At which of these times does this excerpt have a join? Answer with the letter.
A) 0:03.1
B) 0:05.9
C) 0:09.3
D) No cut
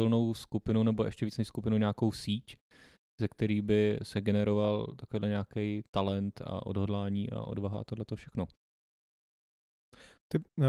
B